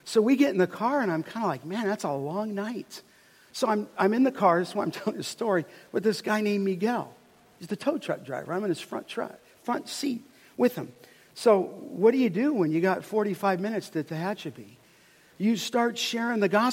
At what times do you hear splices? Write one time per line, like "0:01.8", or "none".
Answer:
none